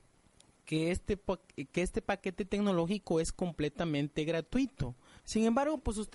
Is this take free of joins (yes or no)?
no